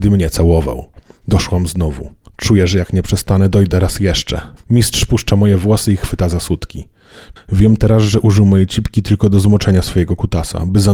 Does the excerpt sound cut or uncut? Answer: cut